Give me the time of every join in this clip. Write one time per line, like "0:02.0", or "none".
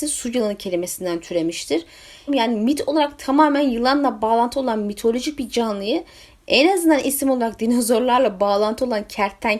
0:02.3